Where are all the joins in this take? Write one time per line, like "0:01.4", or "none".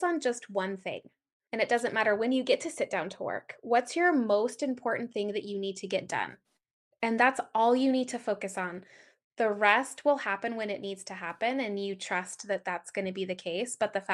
0:01.5